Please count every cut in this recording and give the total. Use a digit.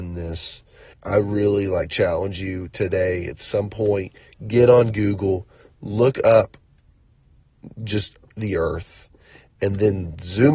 1